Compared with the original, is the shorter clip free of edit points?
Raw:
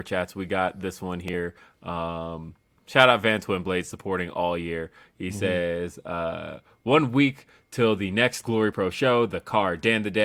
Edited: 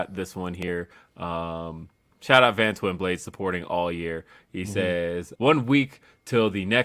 no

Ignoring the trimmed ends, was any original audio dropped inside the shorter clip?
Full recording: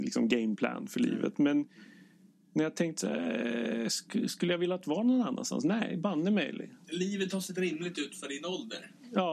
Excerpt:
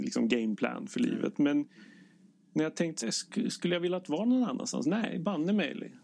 yes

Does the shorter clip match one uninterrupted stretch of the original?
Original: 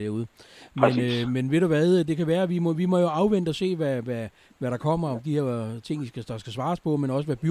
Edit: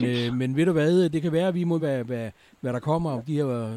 no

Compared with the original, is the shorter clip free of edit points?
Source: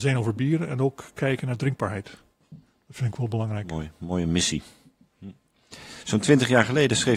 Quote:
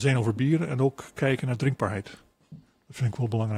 yes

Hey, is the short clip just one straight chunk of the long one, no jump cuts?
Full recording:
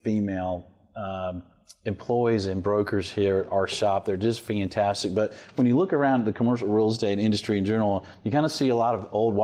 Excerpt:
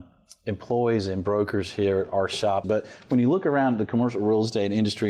no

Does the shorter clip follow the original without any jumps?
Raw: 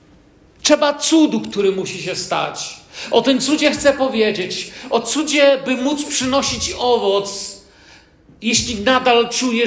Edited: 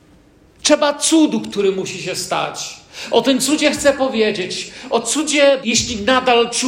no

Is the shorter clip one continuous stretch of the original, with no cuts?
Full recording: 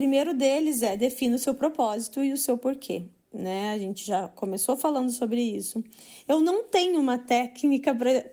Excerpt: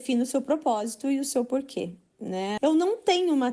no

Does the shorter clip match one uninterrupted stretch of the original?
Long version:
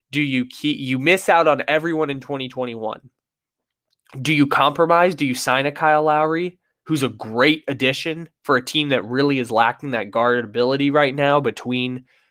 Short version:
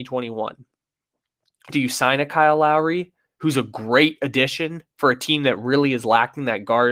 no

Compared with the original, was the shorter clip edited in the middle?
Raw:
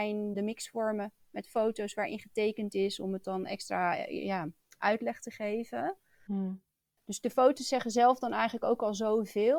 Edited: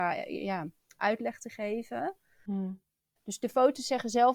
no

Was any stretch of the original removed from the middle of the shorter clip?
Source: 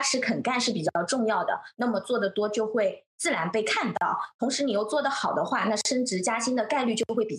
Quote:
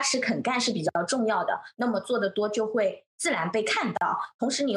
no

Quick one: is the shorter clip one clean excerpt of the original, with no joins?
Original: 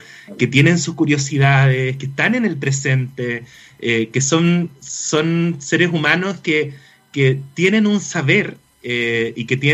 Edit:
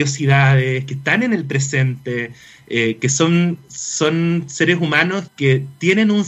no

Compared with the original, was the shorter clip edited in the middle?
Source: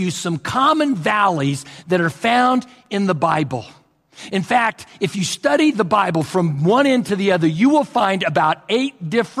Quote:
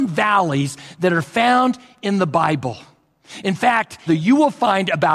yes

